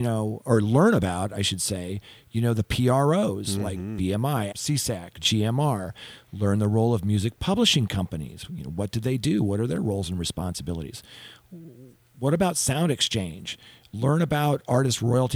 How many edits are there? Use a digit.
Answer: 1